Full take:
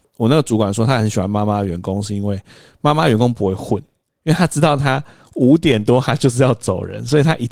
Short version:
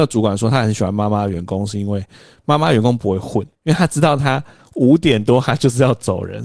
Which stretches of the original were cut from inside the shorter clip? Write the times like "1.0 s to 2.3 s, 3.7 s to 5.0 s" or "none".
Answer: 3.9 s to 4.1 s